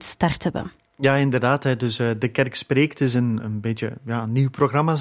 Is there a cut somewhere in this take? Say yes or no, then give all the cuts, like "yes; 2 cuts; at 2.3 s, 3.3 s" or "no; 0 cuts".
no; 0 cuts